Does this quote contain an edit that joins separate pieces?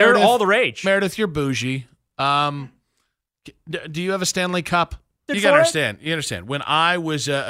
yes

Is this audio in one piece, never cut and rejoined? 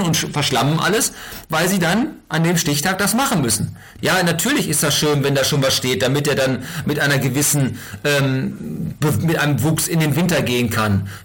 no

